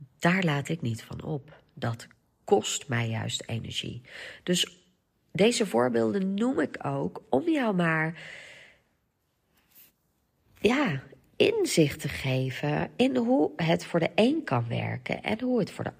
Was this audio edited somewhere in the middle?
no; 0 cuts

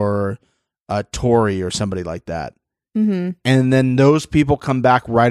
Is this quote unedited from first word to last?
yes; 0 cuts

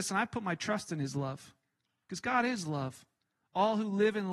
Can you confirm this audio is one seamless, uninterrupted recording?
yes; 0 cuts

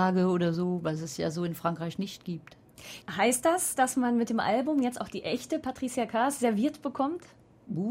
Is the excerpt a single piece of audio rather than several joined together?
no; 1 cut; at 3.0 s

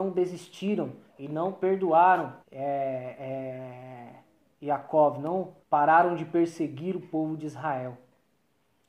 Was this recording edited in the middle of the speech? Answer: yes; 2 cuts; at 2.4 s, 5.6 s

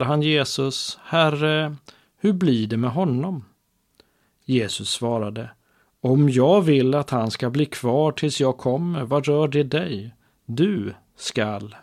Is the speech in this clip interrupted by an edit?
no; 0 cuts

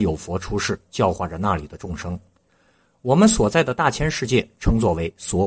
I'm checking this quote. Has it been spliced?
no; 0 cuts

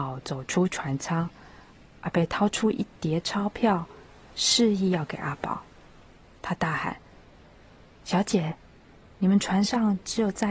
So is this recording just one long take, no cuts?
yes; 0 cuts

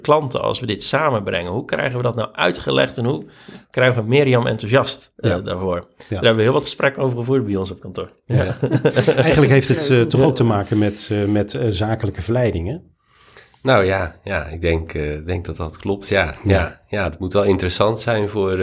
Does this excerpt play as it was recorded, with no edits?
yes; 0 cuts

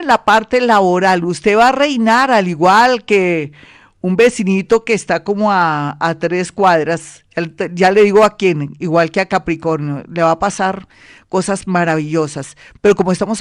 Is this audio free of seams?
yes; 0 cuts

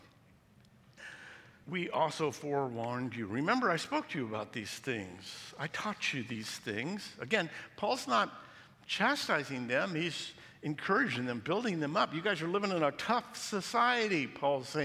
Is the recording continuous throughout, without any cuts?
yes; 0 cuts

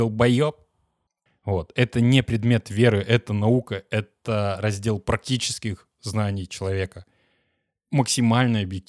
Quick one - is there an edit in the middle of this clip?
yes; 1 cut; at 1.3 s

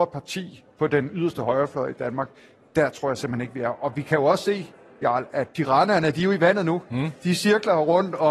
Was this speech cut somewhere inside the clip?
no; 0 cuts

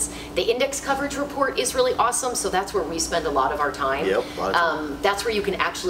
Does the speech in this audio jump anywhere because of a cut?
no; 0 cuts

